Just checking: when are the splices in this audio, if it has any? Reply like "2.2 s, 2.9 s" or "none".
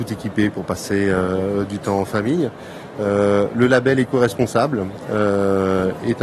2.9 s